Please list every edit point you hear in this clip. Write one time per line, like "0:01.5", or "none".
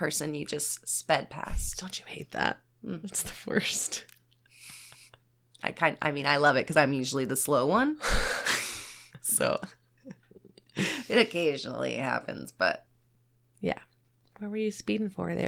none